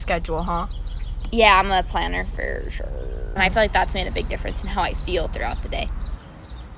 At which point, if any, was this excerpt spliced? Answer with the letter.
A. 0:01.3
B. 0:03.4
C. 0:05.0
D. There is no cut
B